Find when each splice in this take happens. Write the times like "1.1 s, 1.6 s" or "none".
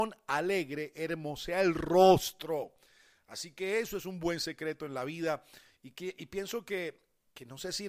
none

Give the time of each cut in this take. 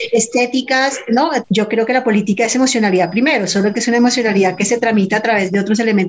1.4 s

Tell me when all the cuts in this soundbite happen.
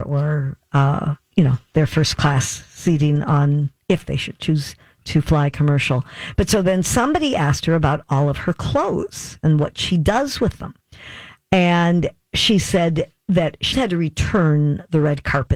1.2 s, 13.7 s

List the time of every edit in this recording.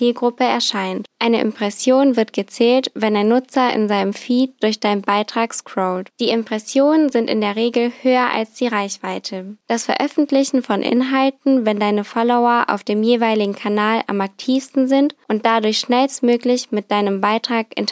1.1 s, 6.1 s, 9.6 s

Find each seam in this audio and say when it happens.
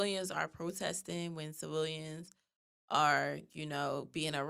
none

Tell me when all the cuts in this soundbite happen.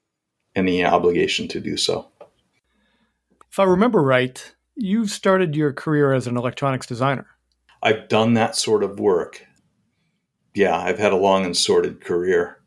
none

